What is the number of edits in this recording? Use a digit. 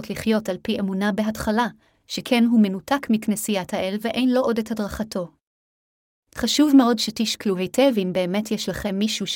1